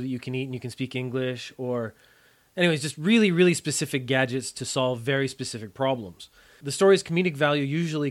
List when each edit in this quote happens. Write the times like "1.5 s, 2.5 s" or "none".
none